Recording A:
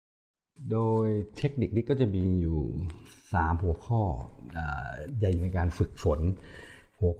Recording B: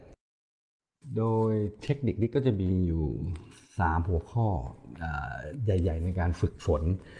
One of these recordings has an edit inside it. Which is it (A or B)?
A